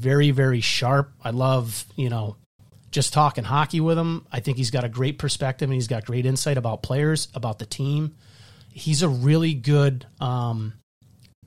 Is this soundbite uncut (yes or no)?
no